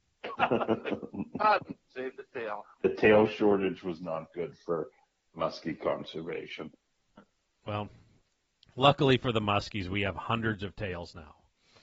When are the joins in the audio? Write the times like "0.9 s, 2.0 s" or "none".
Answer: 2.7 s

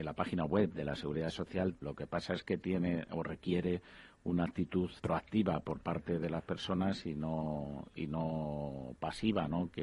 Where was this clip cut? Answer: 1.8 s, 5.0 s

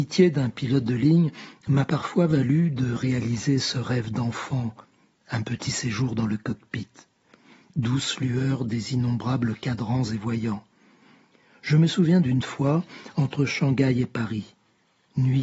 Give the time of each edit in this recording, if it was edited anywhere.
none

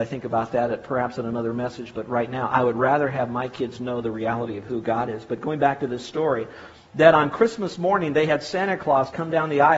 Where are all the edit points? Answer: none

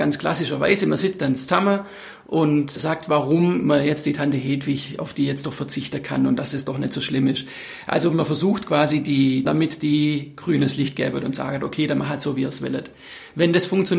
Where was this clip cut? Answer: 2.8 s, 9.4 s

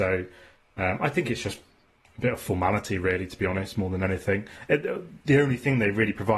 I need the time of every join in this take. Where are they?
none

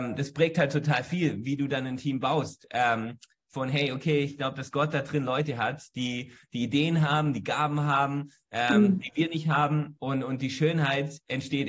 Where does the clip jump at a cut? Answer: none

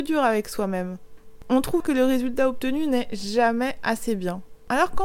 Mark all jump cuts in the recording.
1.8 s

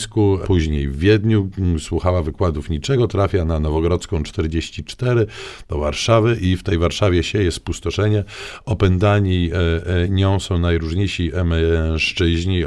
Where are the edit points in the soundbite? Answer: none

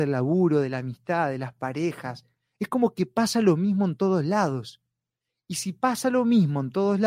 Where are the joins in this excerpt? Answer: none

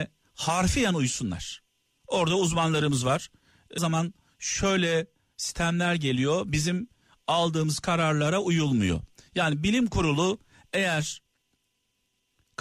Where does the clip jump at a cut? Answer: 3.8 s

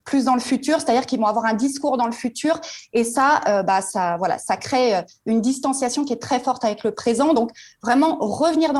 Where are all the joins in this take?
none

